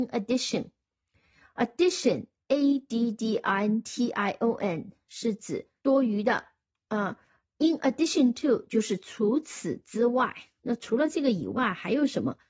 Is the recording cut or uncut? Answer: cut